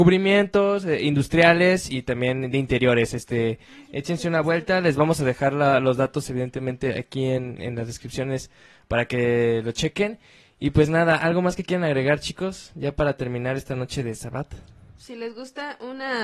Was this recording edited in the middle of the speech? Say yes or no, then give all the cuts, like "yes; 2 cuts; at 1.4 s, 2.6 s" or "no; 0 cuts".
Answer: yes; 1 cut; at 7.6 s